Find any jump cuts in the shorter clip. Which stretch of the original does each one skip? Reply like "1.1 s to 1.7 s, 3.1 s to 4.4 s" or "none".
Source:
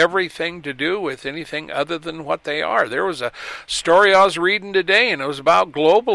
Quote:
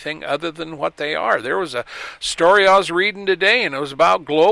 none